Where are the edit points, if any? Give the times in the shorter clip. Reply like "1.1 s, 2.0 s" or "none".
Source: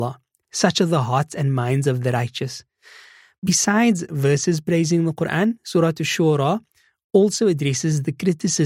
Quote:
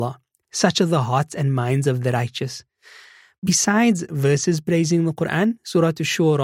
none